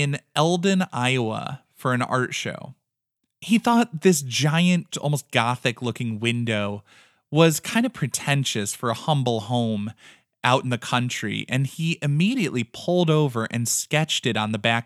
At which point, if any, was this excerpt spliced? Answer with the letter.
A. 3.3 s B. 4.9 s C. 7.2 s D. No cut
B